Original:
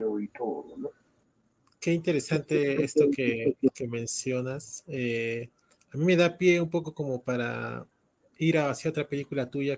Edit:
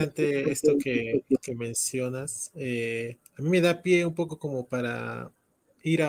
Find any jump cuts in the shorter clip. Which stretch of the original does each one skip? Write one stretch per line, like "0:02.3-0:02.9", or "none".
0:05.6-0:05.8